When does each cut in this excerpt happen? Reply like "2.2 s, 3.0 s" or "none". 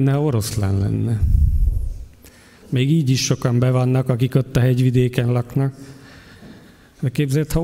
2.6 s